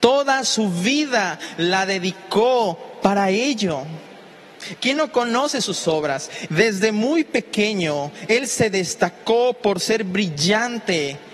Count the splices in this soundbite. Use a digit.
2